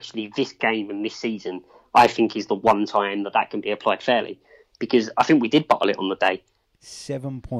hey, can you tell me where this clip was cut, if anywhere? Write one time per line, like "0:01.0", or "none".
0:06.6